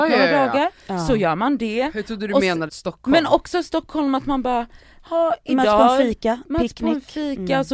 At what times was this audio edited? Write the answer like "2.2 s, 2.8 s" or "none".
2.7 s

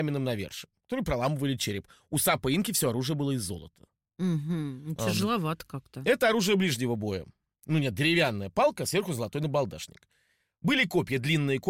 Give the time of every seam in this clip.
none

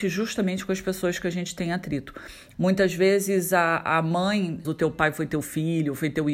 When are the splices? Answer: 2.5 s, 4.6 s

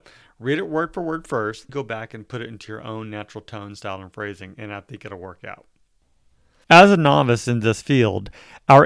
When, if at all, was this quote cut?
1.7 s, 6.6 s

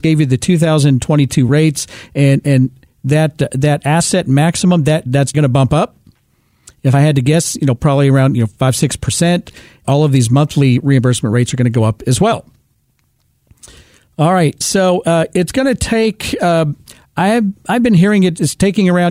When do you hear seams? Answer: 5.3 s, 9.8 s

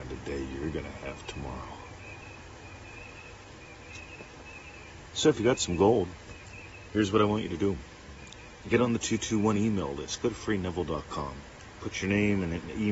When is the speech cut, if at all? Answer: none

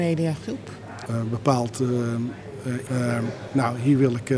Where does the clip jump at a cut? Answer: 1.1 s, 2.9 s

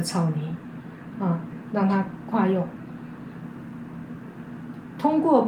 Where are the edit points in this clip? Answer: 1.1 s, 2.3 s

